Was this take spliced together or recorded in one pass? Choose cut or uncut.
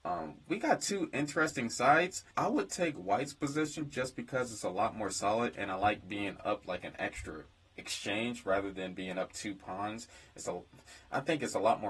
cut